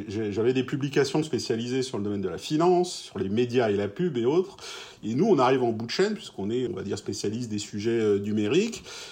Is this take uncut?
no; 2 cuts; at 5.0 s, 6.7 s

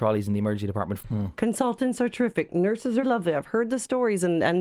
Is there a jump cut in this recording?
yes; 2 cuts; at 1.0 s, 3.0 s

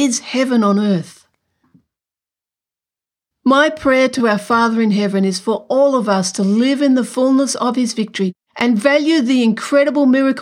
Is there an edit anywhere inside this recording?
yes; 1 cut; at 3.3 s

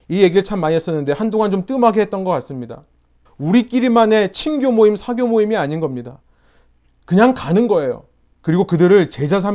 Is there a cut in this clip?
yes; 3 cuts; at 3.3 s, 6.8 s, 8.4 s

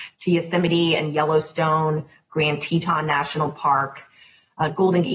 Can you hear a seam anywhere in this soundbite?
no; 0 cuts

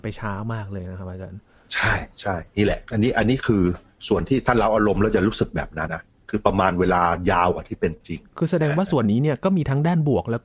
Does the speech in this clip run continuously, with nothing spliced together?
no; 1 cut; at 5.9 s

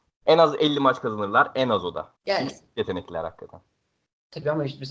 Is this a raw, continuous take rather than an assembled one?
no; 1 cut; at 2.2 s

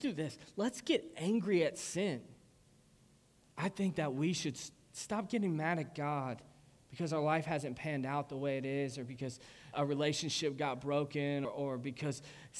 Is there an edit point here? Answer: yes; 3 cuts; at 3.4 s, 9.7 s, 11.4 s

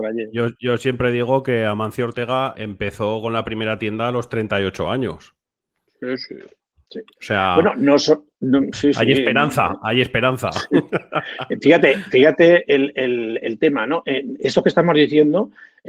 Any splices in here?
yes; 1 cut; at 2.5 s

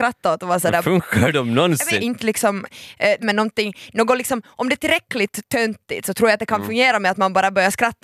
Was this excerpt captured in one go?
no; 2 cuts; at 2.0 s, 3.2 s

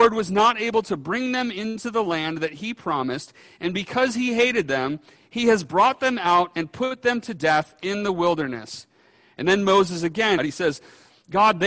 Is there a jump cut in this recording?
yes; 1 cut; at 10.4 s

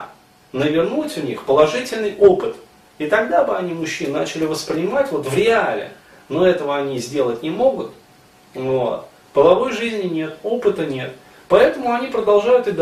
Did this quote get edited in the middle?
no; 0 cuts

